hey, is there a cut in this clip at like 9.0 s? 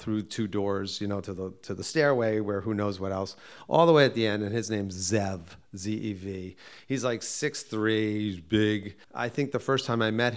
yes; 1 cut; at 9.0 s

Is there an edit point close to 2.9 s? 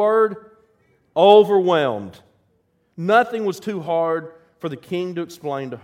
yes; 1 cut; at 2.9 s

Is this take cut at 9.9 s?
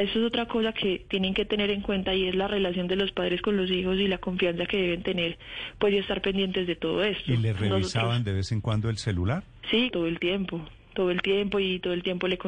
yes; 1 cut; at 9.9 s

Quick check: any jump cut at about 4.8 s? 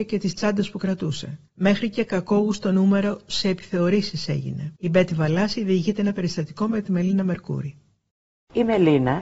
yes; 2 cuts; at 1.5 s, 4.8 s

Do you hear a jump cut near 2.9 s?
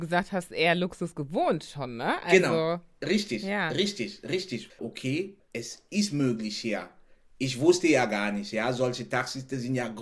no; 1 cut; at 4.7 s

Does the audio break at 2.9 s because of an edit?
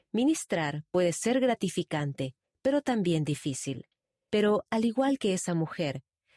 no; 1 cut; at 4.3 s

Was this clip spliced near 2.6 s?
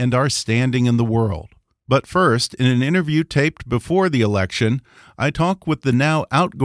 no; 0 cuts

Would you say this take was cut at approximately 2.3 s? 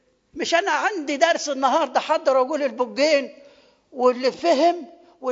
no; 1 cut; at 4.3 s

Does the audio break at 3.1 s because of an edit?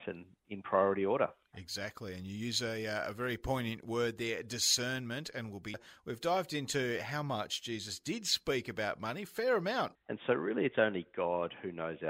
no; 1 cut; at 9.9 s

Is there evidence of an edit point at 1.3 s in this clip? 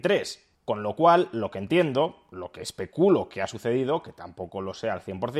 no; 0 cuts

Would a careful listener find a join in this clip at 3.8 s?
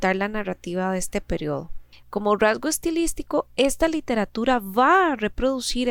no; 1 cut; at 2.0 s

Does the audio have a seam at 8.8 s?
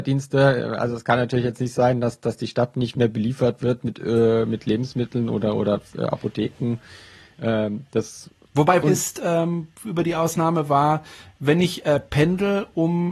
yes; 1 cut; at 8.8 s

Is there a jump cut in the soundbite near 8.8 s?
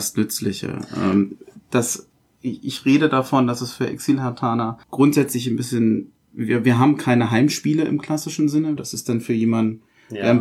yes; 2 cuts; at 4.8 s, 8.8 s

